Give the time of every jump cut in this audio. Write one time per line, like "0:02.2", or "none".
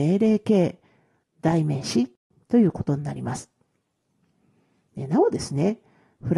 0:01.2